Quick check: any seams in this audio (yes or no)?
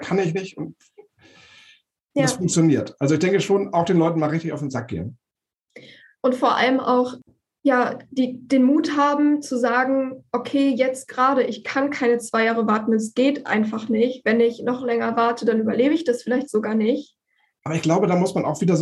yes